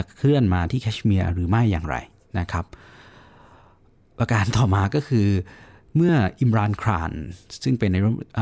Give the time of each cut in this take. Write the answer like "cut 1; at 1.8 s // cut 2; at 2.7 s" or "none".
none